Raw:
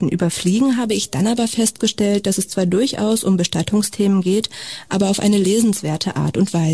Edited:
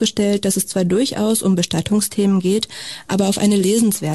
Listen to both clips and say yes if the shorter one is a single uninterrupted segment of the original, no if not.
yes